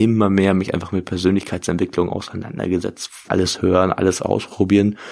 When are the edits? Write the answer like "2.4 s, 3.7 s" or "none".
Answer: 3.2 s